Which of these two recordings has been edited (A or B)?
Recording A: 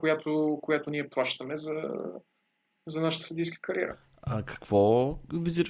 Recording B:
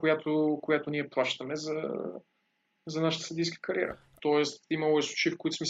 B